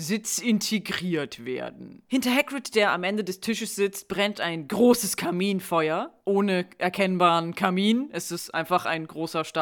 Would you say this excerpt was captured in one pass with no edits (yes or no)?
yes